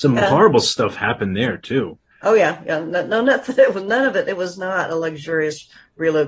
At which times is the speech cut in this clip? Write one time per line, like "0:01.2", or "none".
none